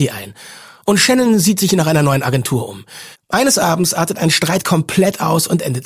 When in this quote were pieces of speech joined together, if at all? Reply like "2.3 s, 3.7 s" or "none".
3.1 s